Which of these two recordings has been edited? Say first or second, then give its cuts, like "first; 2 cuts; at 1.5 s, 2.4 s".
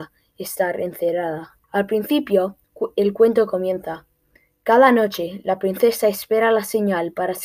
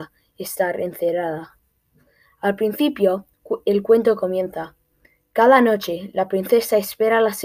first; 1 cut; at 1.6 s